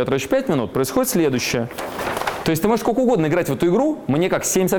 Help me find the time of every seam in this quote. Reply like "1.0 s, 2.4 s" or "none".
2.4 s